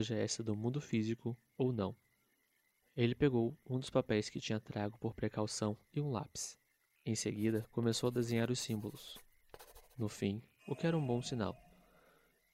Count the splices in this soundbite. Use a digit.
1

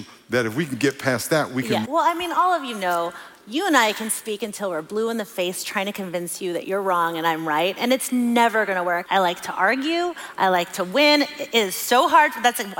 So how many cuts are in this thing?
2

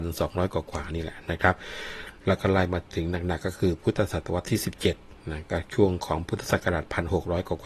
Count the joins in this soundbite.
1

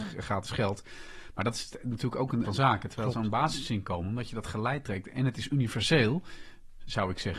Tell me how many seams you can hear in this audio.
1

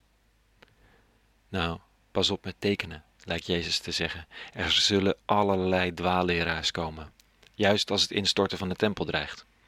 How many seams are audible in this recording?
0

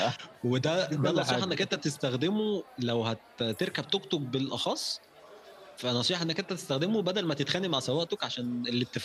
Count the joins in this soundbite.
1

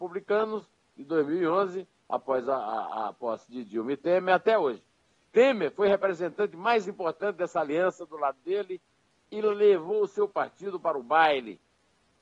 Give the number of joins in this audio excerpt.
1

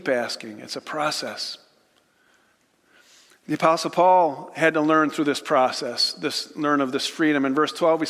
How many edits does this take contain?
0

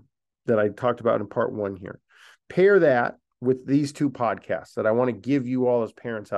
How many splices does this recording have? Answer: 0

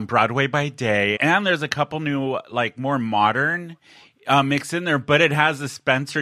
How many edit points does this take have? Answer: 1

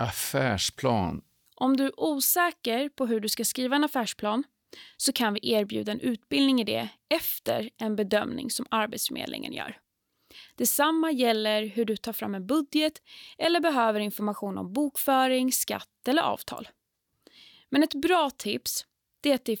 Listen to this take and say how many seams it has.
1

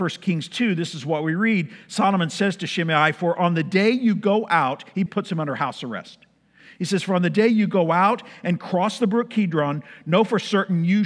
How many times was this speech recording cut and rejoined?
1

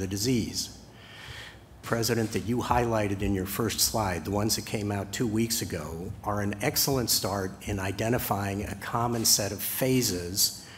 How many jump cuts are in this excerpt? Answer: 1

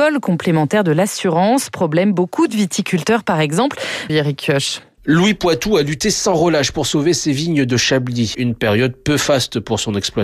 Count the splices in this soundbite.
2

